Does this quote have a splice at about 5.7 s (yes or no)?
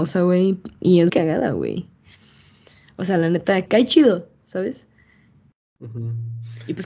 no